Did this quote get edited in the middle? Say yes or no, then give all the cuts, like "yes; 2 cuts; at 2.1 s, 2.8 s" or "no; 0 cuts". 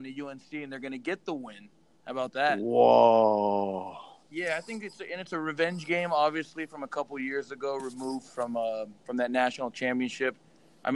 no; 0 cuts